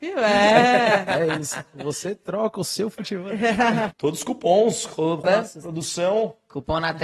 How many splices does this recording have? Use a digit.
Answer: 2